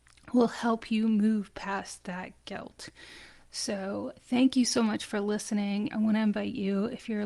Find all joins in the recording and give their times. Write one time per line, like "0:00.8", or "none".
0:05.9

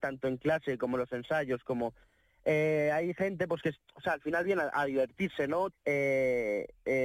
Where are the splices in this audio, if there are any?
0:05.7

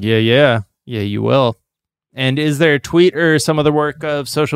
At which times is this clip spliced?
none

